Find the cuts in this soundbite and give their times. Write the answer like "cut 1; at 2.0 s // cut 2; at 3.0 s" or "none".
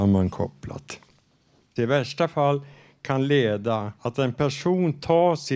cut 1; at 1.8 s // cut 2; at 4.0 s